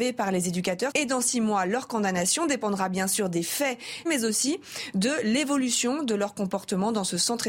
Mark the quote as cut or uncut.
cut